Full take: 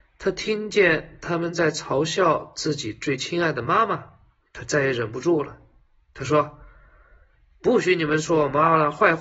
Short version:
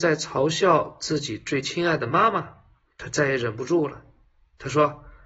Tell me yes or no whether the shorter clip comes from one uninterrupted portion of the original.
yes